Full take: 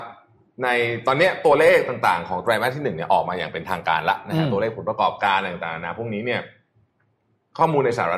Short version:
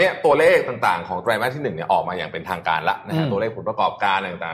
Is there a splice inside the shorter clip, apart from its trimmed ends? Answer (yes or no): no